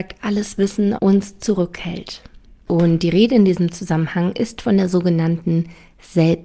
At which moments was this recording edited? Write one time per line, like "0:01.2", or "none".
0:00.9